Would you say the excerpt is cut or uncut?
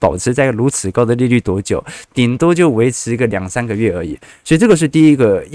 uncut